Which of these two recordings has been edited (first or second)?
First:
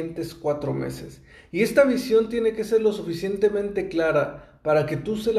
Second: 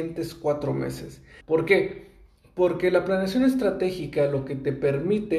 second